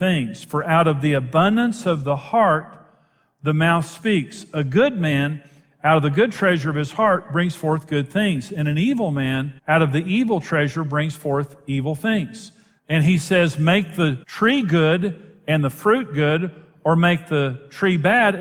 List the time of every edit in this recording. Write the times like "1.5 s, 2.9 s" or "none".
9.6 s, 12.8 s, 14.2 s